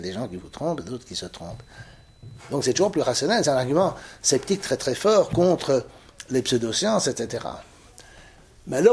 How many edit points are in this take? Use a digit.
1